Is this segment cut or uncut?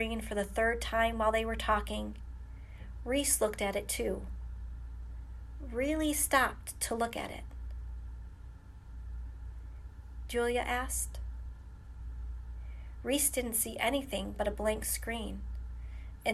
cut